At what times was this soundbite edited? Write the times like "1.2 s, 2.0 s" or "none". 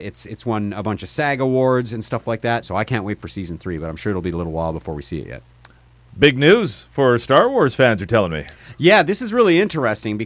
2.6 s